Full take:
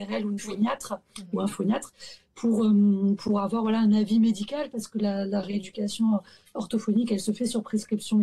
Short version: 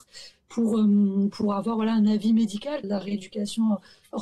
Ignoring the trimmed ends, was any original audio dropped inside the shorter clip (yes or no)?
yes